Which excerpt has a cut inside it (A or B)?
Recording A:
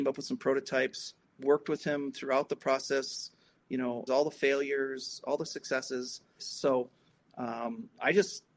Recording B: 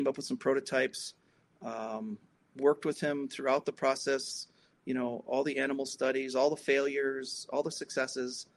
A